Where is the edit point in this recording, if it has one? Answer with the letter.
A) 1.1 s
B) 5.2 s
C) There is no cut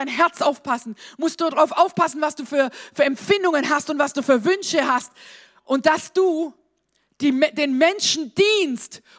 C